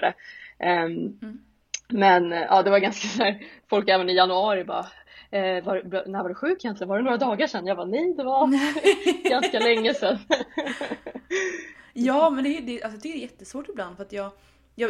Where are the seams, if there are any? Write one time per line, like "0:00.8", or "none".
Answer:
none